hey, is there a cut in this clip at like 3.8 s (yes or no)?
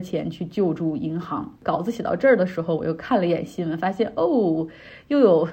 no